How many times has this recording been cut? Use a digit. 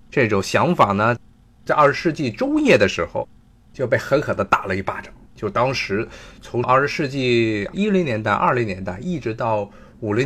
1